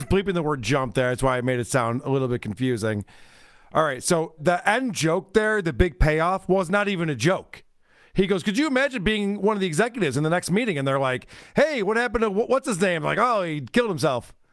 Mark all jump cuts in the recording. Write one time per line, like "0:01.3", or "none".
0:04.4